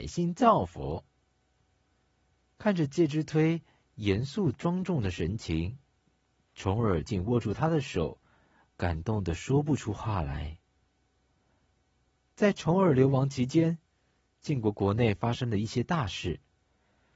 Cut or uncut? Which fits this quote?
cut